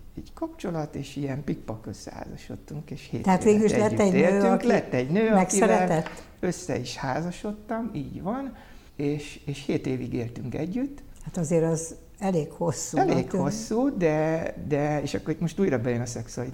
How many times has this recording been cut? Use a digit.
1